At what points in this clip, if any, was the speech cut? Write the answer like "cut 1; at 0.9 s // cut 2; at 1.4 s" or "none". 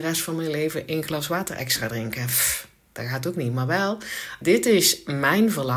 cut 1; at 4.4 s